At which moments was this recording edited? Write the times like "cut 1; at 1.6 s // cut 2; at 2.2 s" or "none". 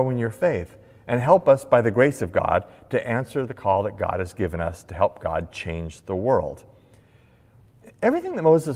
none